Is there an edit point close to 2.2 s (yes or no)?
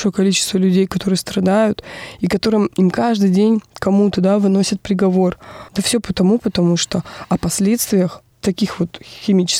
no